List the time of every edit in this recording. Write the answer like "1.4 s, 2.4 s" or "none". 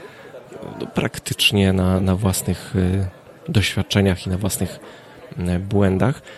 3.4 s